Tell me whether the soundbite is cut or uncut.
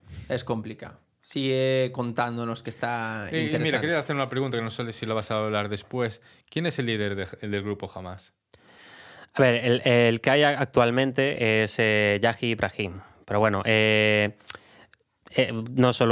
uncut